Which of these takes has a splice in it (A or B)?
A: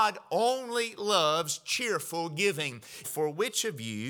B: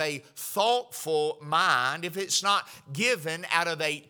A